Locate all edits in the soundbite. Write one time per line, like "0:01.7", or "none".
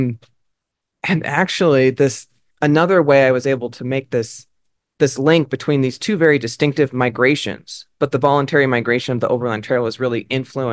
0:02.5